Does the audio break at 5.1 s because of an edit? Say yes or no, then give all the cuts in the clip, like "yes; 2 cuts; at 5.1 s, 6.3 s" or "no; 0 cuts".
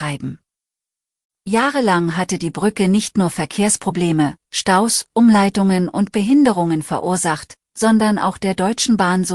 no; 0 cuts